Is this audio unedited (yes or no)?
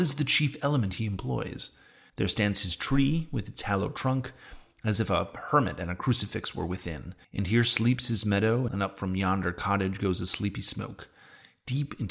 no